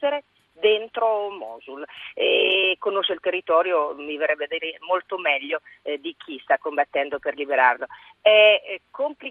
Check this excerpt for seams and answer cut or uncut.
uncut